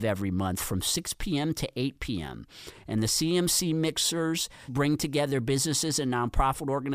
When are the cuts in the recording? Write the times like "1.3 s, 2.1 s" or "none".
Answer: 4.7 s